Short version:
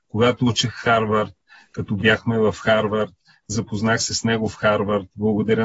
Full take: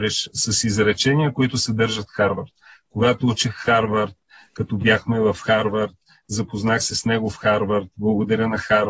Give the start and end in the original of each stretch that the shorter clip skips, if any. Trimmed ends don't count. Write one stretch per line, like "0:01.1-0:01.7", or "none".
none